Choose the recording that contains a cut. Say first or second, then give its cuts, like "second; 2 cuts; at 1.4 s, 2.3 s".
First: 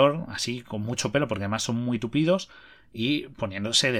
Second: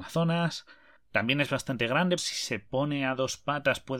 second; 2 cuts; at 1.0 s, 2.2 s